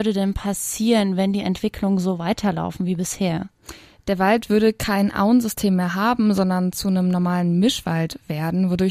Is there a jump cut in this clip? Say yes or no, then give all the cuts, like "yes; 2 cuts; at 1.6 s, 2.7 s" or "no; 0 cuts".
no; 0 cuts